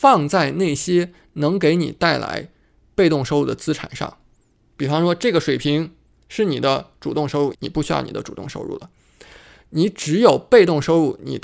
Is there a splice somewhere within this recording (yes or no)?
yes